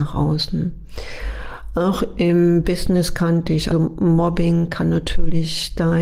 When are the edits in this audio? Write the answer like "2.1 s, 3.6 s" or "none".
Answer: 3.7 s

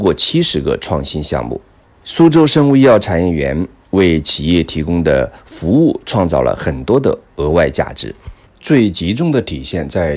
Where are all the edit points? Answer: none

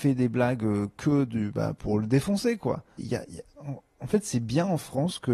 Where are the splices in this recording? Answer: 3.0 s

